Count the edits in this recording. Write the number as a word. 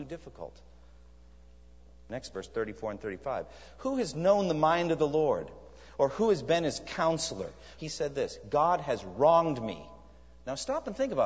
two